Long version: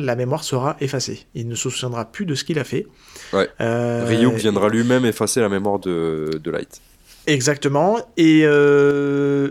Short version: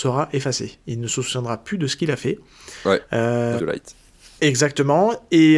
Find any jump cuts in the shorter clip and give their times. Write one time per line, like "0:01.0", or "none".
0:03.6